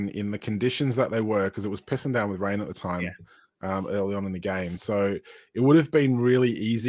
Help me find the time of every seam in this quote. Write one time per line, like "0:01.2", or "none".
none